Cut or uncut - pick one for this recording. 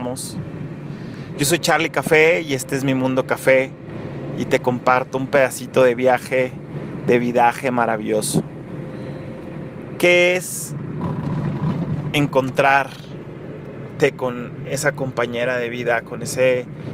cut